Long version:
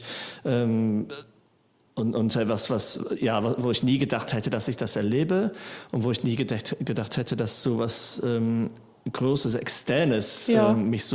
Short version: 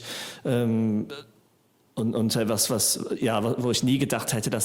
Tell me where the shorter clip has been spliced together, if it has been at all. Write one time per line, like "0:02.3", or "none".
none